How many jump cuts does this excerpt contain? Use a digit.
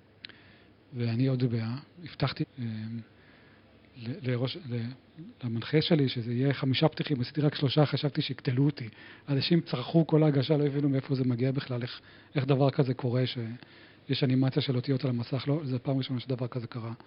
1